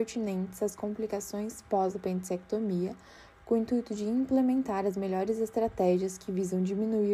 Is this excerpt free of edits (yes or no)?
yes